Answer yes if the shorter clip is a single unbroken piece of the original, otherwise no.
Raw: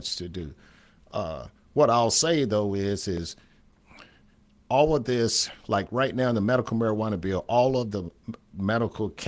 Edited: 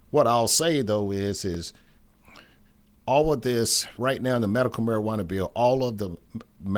no